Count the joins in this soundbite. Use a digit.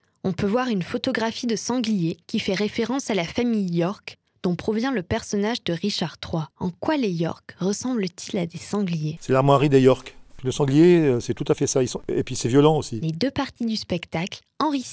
2